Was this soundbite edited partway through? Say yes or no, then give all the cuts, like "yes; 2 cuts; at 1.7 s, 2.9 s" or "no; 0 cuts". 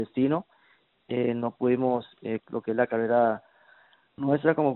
yes; 1 cut; at 2.4 s